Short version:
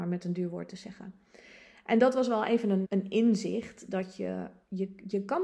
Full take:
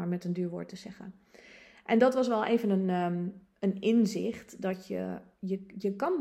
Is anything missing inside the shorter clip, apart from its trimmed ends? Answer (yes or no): yes